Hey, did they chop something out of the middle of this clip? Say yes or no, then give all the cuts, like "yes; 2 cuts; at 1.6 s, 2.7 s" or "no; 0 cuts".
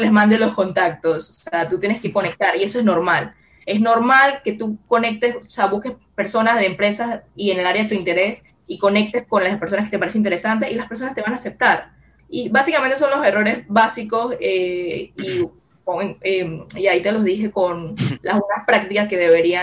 yes; 1 cut; at 12.2 s